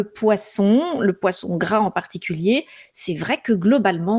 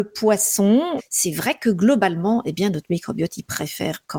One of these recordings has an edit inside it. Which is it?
second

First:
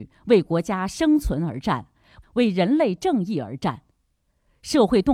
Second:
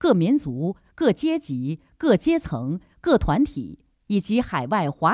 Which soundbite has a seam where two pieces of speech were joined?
first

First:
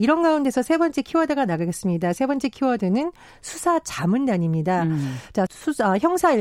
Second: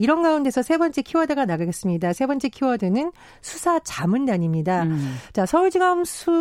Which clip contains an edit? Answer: first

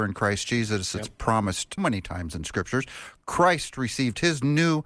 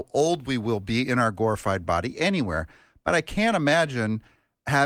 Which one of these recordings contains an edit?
first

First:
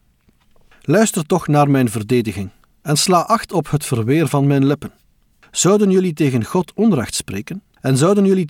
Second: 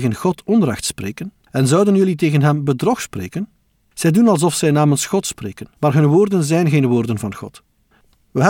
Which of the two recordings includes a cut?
second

